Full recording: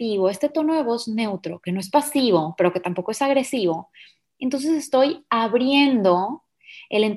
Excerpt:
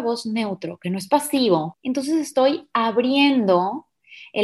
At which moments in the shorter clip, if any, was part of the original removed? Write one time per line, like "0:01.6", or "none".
0:01.7